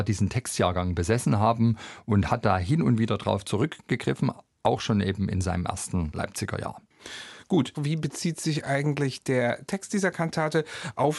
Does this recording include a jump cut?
yes; 1 cut; at 7.7 s

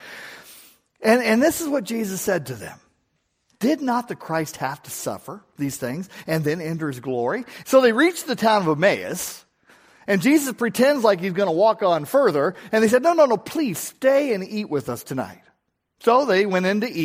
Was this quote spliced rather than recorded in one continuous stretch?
yes; 2 cuts; at 3.5 s, 7.6 s

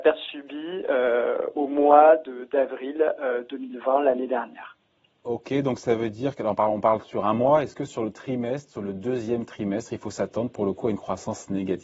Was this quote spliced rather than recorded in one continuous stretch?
no; 0 cuts

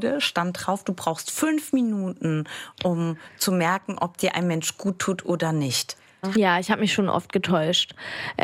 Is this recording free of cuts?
no; 1 cut; at 6.3 s

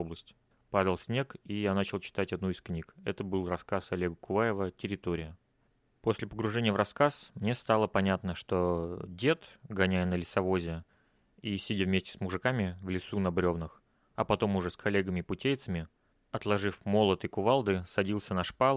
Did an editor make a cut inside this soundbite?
no; 0 cuts

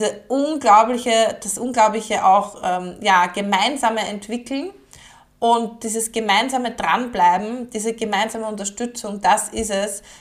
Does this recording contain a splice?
no; 0 cuts

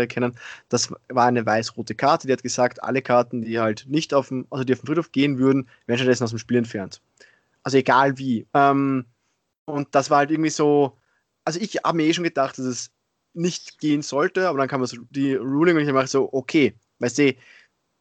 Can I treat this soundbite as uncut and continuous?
no; 1 cut; at 8.5 s

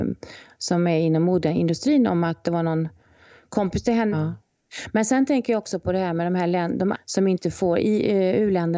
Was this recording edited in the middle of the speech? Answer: yes; 2 cuts; at 4.1 s, 6.9 s

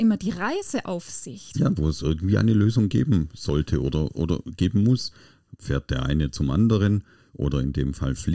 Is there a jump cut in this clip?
yes; 1 cut; at 1.5 s

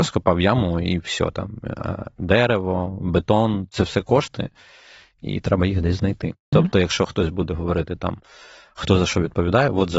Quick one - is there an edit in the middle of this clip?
yes; 1 cut; at 6.5 s

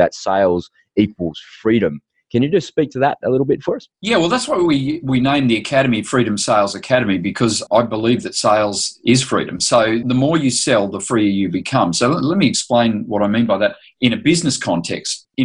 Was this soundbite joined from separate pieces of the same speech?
yes; 1 cut; at 3.9 s

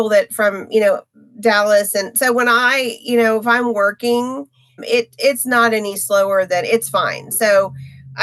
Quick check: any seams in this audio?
yes; 1 cut; at 4.8 s

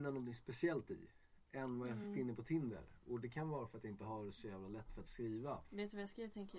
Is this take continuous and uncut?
yes; 0 cuts

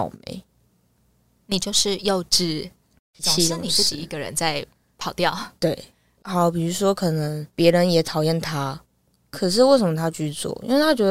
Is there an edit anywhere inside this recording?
no; 0 cuts

